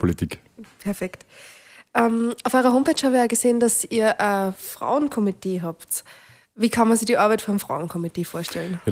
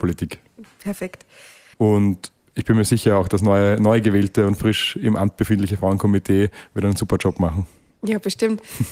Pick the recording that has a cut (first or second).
second